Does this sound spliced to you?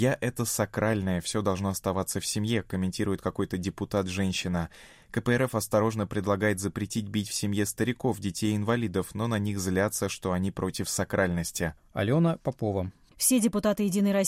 no; 0 cuts

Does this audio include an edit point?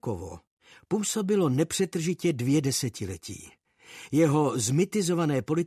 no; 0 cuts

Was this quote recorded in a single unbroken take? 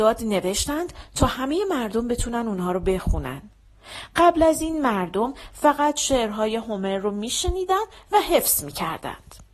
yes; 0 cuts

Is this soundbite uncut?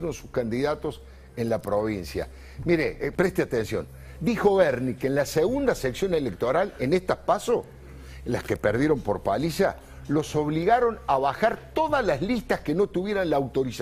no; 1 cut; at 3.1 s

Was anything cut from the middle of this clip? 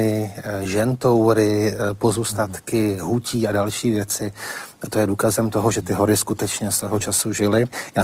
no; 0 cuts

